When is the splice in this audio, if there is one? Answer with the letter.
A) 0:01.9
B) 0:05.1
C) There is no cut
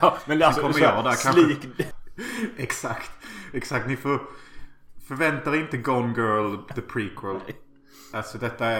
A